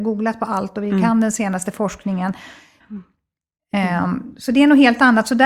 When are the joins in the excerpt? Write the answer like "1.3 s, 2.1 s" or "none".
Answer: 2.8 s